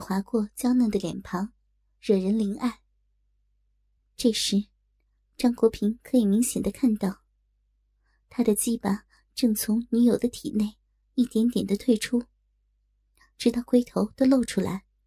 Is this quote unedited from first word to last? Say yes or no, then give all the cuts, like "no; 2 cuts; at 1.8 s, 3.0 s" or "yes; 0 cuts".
no; 1 cut; at 4.0 s